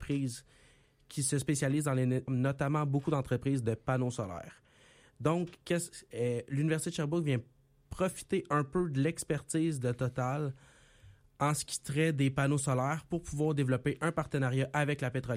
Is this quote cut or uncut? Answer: cut